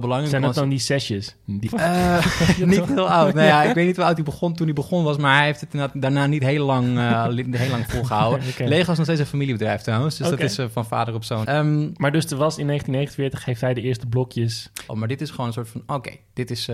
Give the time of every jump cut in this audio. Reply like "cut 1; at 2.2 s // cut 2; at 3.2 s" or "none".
cut 1; at 1.7 s // cut 2; at 11.4 s // cut 3; at 14.9 s